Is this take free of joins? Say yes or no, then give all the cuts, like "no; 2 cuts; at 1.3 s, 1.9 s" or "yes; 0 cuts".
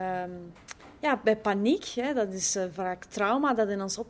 yes; 0 cuts